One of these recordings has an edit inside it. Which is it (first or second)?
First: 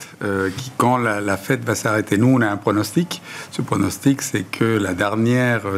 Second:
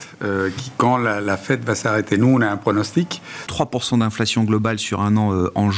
second